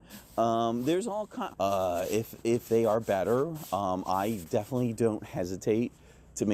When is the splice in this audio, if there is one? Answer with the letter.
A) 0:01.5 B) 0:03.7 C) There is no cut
A